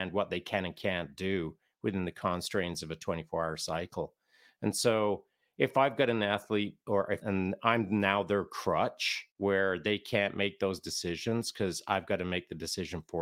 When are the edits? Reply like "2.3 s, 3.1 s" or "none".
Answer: 7.2 s, 9.3 s